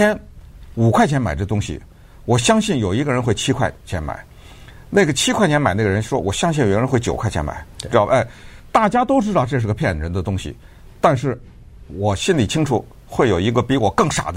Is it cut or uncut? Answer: uncut